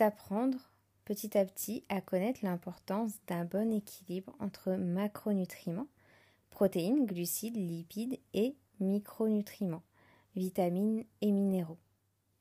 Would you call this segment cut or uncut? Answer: uncut